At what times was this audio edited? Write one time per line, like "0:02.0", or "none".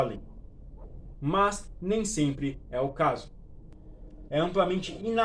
0:01.1
0:04.3